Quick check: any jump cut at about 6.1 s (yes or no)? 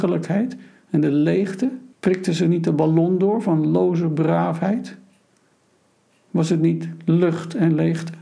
no